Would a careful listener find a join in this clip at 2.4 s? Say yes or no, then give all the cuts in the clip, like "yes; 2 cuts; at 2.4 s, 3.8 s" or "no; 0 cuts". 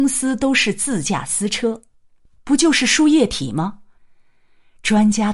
yes; 2 cuts; at 2.4 s, 4.0 s